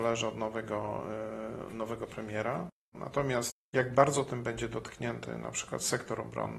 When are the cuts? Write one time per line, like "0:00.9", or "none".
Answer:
0:02.9